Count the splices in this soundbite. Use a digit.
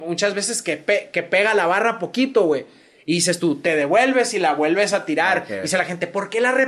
0